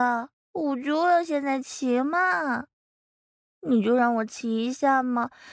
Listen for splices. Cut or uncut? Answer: uncut